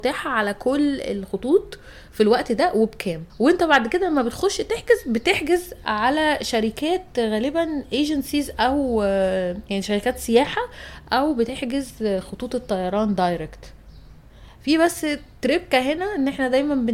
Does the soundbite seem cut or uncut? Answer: cut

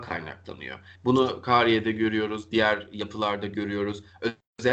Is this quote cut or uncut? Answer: cut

